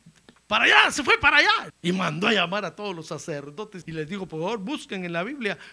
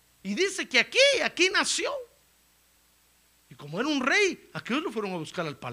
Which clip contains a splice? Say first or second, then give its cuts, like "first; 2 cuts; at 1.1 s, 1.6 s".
first; 2 cuts; at 1.7 s, 3.8 s